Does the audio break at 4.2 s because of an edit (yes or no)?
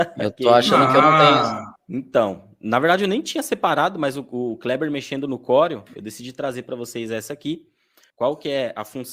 no